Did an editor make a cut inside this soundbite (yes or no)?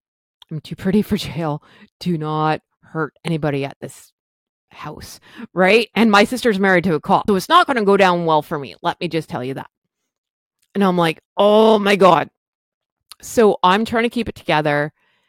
yes